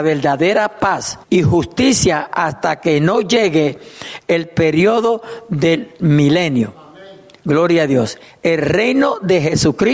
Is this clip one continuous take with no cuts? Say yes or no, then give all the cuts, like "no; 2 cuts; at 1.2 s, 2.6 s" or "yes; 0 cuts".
no; 1 cut; at 1.2 s